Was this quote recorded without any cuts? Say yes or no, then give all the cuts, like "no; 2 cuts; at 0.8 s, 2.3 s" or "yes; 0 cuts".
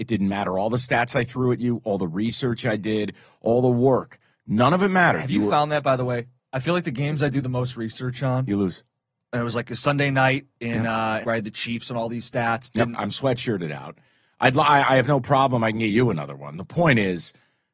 no; 2 cuts; at 11.2 s, 12.9 s